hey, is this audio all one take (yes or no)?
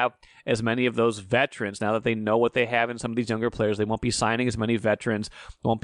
yes